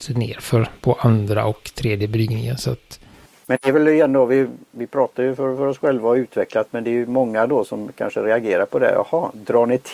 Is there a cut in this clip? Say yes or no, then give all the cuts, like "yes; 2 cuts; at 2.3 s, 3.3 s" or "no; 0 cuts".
no; 0 cuts